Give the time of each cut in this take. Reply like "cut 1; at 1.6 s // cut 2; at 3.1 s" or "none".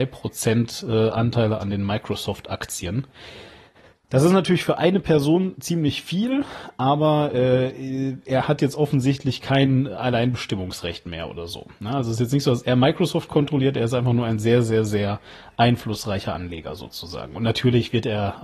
none